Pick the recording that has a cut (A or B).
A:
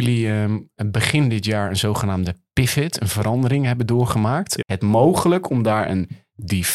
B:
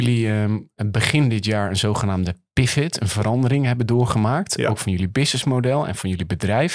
A